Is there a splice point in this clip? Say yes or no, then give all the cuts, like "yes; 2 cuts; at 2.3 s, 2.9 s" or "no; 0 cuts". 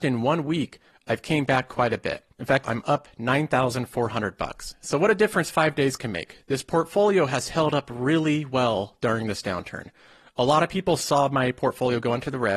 yes; 1 cut; at 2.6 s